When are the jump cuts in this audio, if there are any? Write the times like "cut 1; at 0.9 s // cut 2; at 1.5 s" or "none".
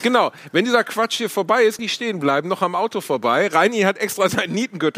cut 1; at 1.8 s